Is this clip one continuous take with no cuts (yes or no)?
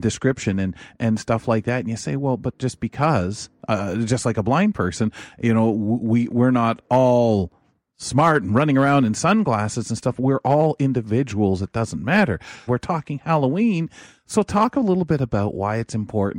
no